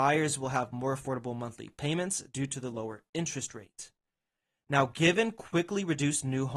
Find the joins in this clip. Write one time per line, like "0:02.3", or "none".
none